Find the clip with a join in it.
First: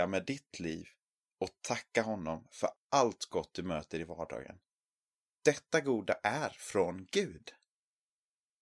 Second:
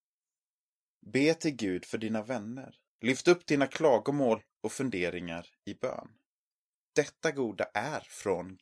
second; 1 cut; at 6.7 s

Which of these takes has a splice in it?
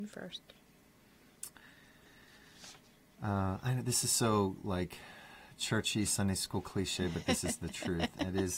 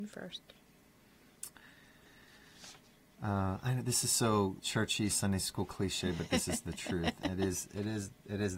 second; 1 cut; at 4.6 s

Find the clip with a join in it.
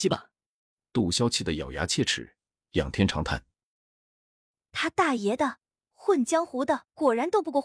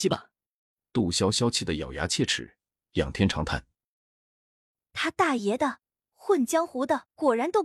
first; 1 cut; at 1.1 s

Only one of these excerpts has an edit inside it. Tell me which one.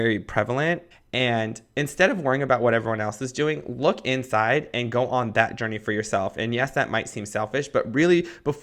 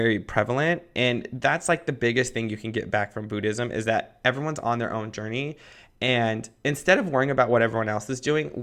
first; 1 cut; at 0.9 s

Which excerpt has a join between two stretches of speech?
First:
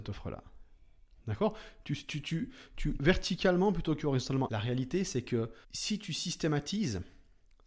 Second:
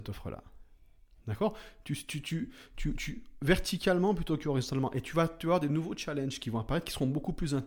first; 3 cuts; at 3.0 s, 4.5 s, 5.6 s

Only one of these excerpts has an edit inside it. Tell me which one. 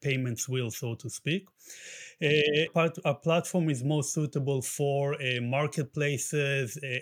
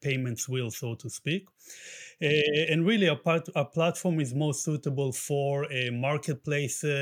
first; 1 cut; at 2.7 s

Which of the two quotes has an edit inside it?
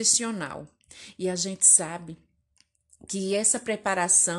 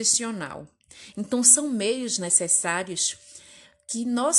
second; 1 cut; at 1.1 s

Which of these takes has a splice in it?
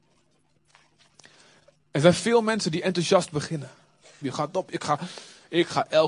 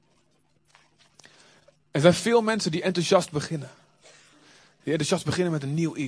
first; 1 cut; at 4.2 s

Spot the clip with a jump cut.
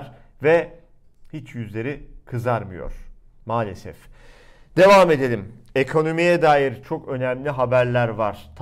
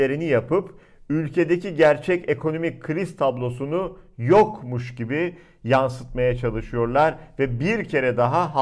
first; 1 cut; at 6.8 s

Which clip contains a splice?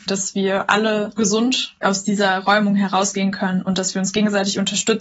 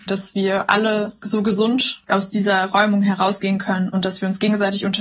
first; 1 cut; at 1.2 s

